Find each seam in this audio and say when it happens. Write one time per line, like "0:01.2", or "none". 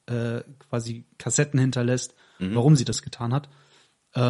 none